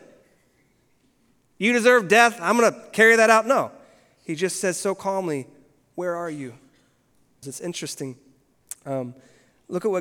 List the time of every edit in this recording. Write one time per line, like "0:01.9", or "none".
0:07.4